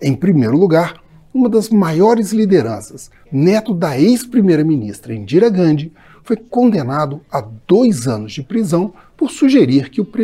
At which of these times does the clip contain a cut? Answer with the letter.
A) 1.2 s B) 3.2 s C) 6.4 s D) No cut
B